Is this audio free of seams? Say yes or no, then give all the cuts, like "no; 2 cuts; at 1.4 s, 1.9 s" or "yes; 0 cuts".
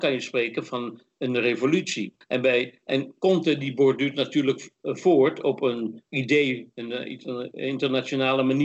no; 2 cuts; at 2.2 s, 6.1 s